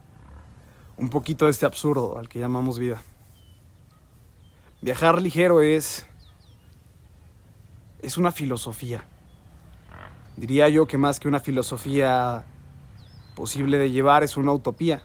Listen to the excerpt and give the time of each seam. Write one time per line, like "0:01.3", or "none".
none